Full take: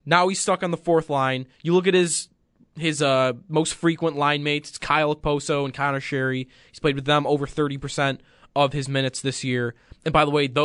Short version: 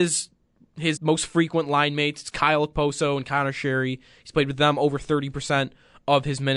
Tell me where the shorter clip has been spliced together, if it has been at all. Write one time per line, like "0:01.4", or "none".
0:01.0